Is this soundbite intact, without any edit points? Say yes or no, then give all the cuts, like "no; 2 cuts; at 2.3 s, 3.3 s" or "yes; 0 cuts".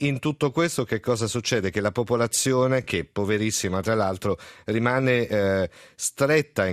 yes; 0 cuts